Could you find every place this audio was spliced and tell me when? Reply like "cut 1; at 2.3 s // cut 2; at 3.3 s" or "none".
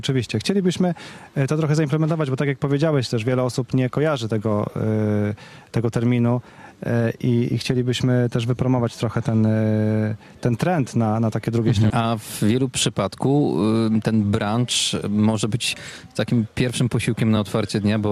cut 1; at 11.9 s